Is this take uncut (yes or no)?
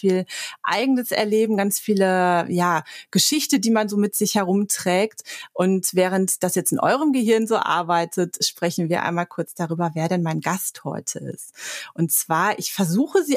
yes